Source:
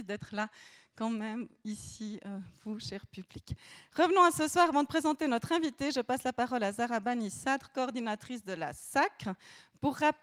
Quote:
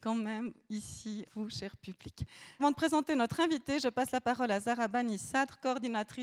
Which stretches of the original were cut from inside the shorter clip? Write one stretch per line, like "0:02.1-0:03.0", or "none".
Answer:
0:02.2-0:02.5
0:03.9-0:04.7